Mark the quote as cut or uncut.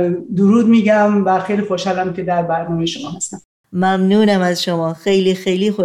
uncut